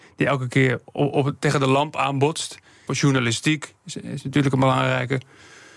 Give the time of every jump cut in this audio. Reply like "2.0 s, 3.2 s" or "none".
2.9 s